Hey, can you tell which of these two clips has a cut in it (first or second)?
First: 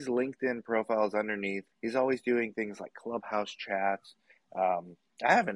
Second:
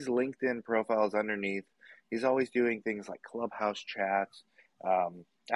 first